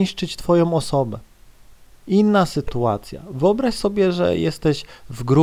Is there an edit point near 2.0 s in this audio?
yes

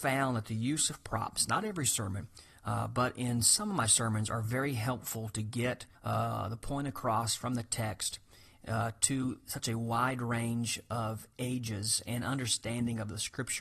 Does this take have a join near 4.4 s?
no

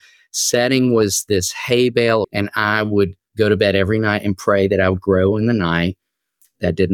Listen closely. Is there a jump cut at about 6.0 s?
no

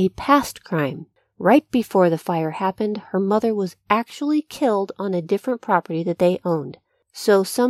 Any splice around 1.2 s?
no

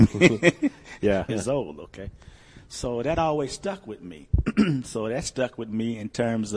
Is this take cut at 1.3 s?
yes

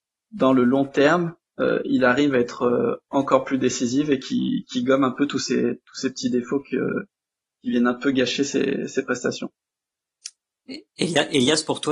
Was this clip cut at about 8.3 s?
no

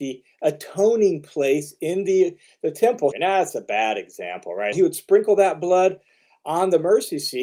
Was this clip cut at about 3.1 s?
yes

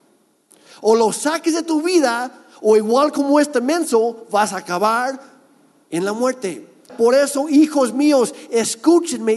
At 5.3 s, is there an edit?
no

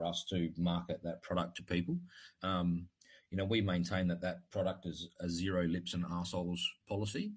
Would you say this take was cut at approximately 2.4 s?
yes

